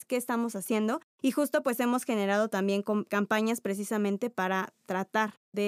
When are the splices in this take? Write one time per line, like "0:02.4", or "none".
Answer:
0:03.1